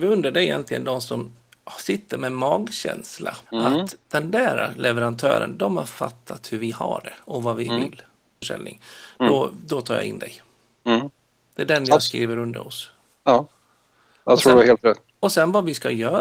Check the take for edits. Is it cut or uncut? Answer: cut